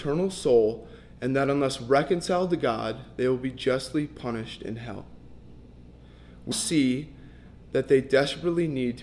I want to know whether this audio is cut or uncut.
cut